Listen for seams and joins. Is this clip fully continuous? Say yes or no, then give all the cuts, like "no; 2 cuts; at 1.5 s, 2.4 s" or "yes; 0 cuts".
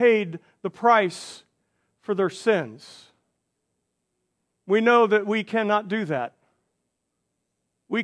yes; 0 cuts